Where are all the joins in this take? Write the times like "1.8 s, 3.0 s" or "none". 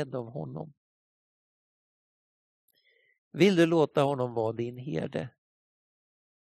none